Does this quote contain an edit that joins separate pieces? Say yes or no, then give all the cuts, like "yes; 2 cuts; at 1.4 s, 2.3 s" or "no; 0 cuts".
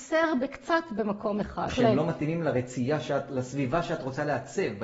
yes; 1 cut; at 1.7 s